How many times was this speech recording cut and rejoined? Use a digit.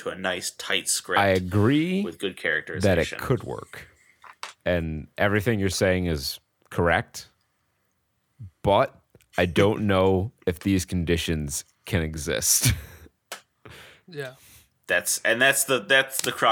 1